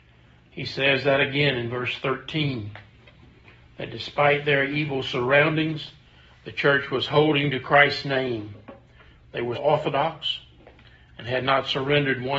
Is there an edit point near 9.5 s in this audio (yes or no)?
yes